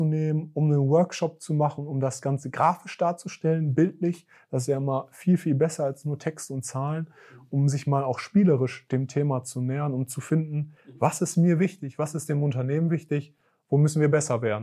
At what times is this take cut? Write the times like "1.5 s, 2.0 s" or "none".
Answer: none